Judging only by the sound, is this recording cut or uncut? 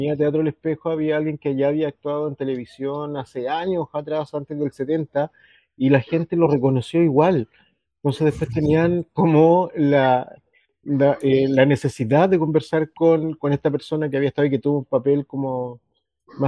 uncut